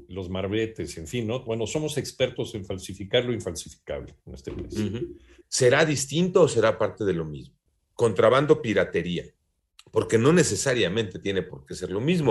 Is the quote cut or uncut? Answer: cut